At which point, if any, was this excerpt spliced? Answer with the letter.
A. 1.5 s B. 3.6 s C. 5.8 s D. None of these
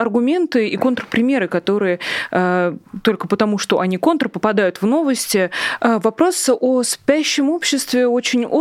C